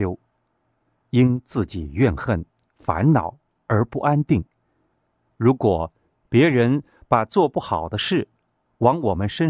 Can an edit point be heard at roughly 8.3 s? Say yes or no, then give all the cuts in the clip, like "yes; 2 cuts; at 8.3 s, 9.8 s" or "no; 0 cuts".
no; 1 cut; at 5.3 s